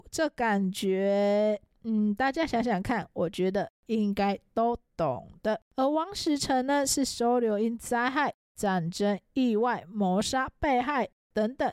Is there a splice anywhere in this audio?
yes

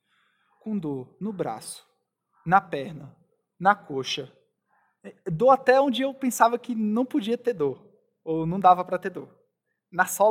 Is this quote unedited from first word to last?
yes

